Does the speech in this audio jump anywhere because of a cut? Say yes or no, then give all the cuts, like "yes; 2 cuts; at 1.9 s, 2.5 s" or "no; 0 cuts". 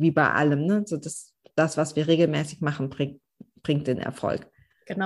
no; 0 cuts